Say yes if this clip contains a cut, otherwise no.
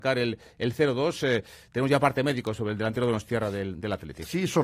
no